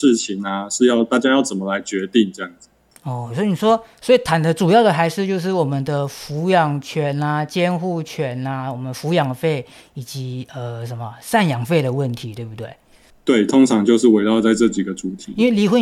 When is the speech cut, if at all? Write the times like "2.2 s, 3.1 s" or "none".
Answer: none